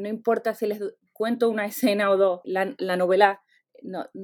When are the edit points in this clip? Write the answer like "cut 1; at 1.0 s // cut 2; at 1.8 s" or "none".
cut 1; at 2.4 s